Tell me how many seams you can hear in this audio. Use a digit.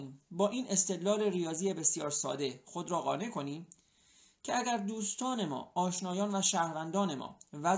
0